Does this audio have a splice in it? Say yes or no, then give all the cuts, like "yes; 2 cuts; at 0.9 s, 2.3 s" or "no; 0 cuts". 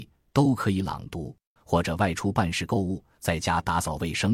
yes; 1 cut; at 1.6 s